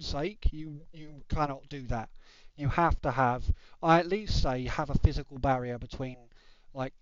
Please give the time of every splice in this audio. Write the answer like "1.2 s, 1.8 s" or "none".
none